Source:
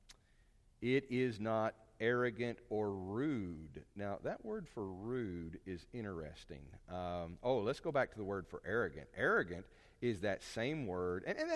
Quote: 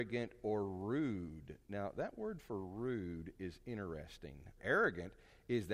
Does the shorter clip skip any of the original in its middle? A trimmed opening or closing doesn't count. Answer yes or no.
yes